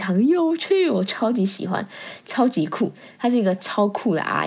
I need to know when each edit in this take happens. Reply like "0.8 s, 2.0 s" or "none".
none